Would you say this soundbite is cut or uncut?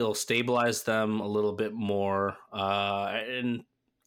uncut